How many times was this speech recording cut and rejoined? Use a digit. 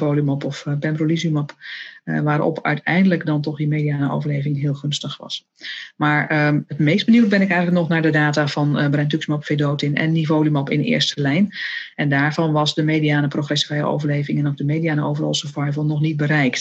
0